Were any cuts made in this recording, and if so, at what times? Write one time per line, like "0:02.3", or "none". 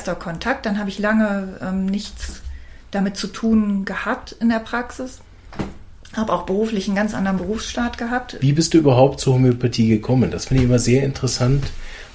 0:08.4